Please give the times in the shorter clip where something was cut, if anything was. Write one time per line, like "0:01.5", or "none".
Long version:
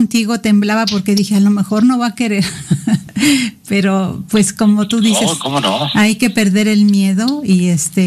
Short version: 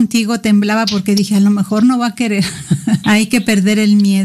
0:03.0